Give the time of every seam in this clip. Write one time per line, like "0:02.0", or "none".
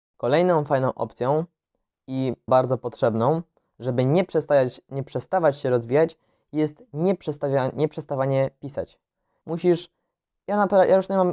0:02.5
0:09.4